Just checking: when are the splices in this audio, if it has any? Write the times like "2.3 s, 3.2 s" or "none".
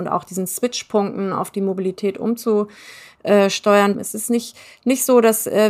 3.9 s